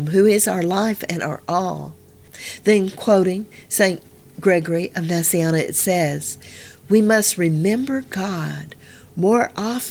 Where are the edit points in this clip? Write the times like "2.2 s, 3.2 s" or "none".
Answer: none